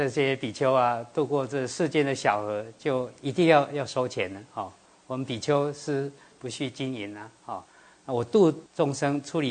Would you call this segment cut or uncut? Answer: uncut